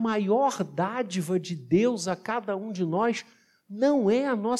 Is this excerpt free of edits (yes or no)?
yes